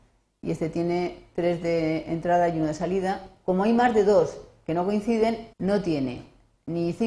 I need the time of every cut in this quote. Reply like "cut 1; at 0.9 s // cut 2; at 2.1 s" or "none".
cut 1; at 5.5 s